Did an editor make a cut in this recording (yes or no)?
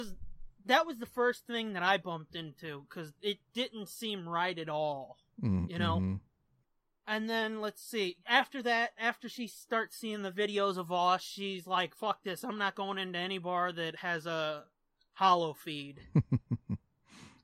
no